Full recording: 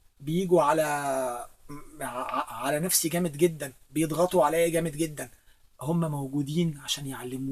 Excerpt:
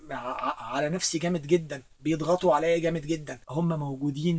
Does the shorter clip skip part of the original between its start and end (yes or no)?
yes